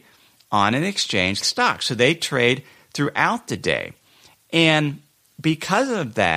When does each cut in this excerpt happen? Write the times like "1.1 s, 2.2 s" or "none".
1.4 s